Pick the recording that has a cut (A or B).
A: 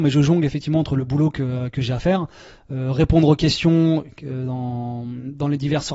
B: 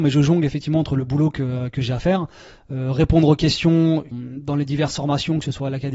B